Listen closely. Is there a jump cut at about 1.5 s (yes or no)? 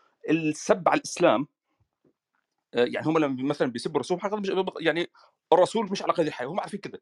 no